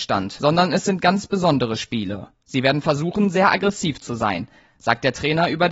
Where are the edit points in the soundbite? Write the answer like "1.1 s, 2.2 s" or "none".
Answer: none